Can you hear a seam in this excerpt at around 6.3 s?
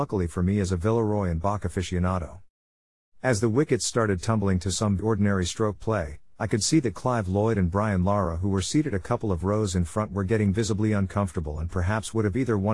no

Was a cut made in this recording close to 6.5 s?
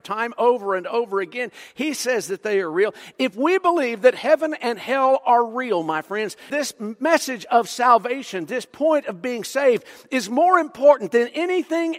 yes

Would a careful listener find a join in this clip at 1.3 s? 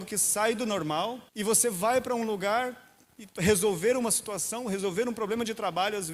yes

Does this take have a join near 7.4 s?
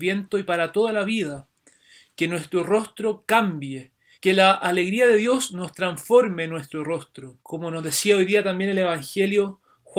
yes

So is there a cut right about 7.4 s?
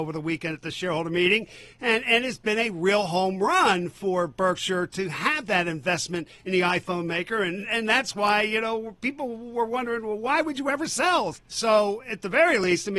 no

